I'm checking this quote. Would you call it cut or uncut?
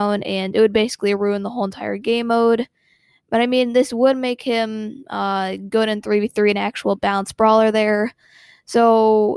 uncut